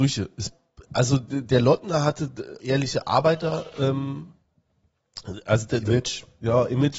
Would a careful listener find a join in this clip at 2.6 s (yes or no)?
yes